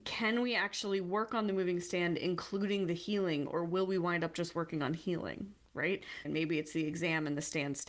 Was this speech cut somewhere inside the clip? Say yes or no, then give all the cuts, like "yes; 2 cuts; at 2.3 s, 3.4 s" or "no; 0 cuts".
yes; 1 cut; at 6.2 s